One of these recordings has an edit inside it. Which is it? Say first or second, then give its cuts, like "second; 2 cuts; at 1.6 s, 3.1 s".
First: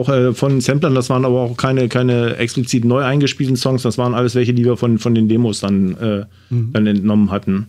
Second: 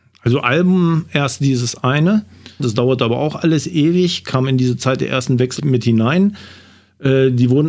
second; 2 cuts; at 2.6 s, 5.6 s